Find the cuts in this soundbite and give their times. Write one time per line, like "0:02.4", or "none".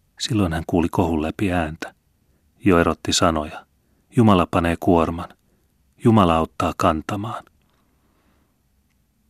0:04.1